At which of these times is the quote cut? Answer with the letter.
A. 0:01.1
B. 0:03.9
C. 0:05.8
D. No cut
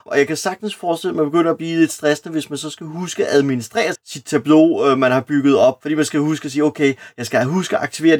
B